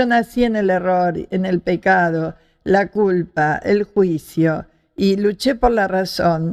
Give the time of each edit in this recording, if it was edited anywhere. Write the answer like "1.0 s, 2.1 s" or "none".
none